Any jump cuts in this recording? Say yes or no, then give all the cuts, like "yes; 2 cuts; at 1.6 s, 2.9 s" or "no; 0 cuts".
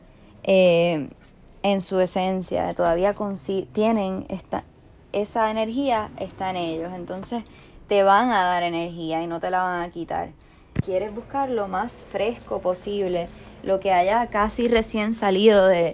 yes; 1 cut; at 10.8 s